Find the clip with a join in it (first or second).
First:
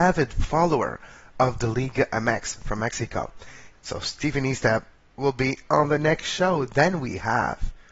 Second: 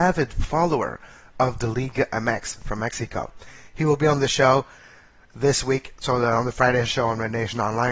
first